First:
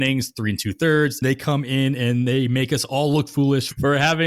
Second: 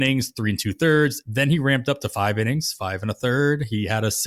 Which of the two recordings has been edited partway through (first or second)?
first